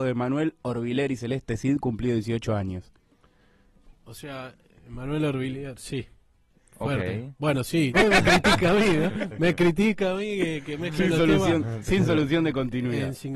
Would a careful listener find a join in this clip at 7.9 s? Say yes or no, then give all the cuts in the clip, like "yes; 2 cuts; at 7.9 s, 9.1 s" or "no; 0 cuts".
yes; 1 cut; at 7.9 s